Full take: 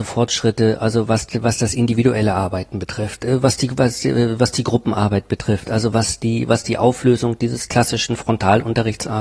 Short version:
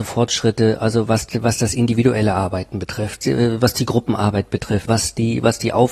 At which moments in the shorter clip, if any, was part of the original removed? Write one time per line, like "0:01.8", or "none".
0:03.2
0:04.9